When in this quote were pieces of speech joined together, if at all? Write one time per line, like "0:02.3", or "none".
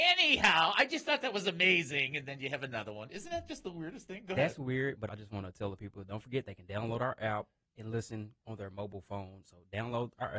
0:05.1
0:09.4

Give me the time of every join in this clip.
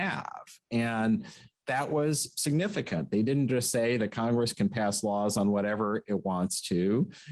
none

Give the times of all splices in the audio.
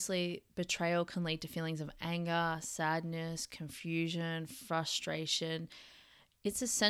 none

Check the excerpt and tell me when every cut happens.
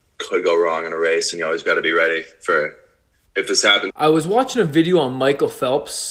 0:03.9

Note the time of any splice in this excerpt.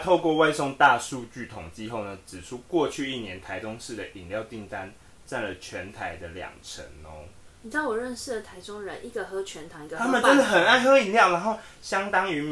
0:07.5

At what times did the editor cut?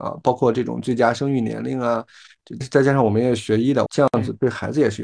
0:02.6
0:03.9

